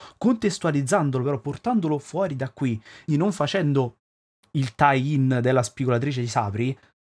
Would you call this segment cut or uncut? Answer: cut